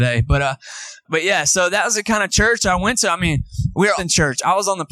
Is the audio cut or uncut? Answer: cut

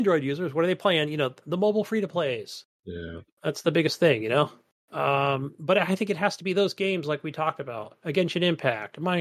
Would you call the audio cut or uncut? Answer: uncut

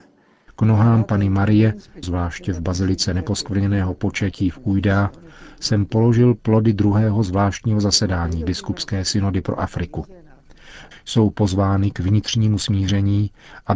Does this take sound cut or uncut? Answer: cut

